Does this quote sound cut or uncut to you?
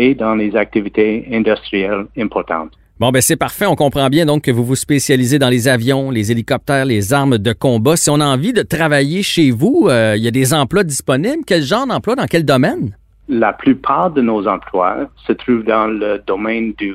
uncut